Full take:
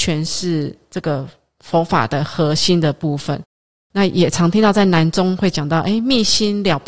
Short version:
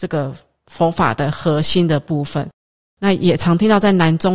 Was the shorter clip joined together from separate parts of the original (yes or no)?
no